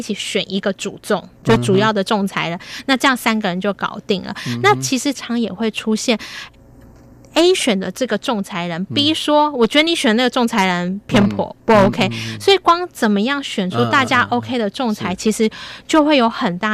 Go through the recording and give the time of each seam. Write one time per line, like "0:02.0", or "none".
0:05.1